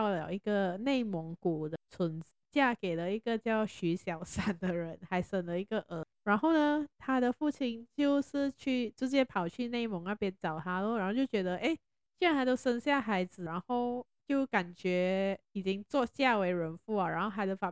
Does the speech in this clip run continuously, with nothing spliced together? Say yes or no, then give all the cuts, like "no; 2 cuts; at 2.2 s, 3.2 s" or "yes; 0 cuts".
yes; 0 cuts